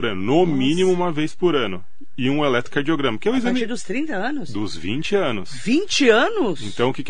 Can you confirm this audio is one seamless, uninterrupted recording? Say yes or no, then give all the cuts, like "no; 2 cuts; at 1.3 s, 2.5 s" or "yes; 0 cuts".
yes; 0 cuts